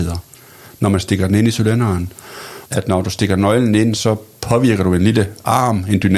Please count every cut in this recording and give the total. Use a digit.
2